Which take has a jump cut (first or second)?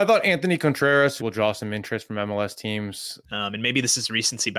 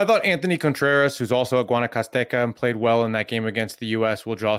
first